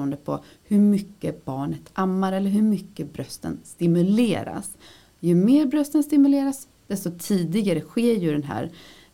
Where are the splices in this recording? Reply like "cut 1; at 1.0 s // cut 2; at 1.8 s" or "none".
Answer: none